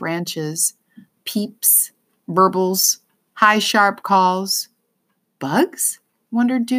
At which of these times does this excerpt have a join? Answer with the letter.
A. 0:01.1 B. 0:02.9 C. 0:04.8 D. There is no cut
A